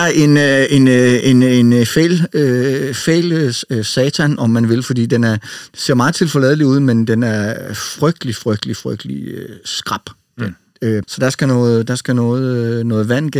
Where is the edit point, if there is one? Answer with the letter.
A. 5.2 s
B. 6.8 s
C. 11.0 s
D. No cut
C